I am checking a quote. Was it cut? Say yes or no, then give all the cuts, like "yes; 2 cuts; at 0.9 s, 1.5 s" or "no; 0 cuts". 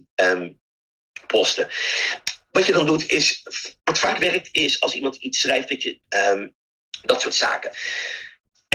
yes; 1 cut; at 6.0 s